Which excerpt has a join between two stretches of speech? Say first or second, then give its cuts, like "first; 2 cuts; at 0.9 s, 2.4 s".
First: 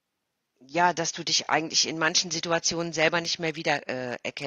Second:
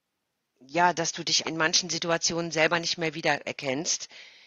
second; 2 cuts; at 1.4 s, 3.4 s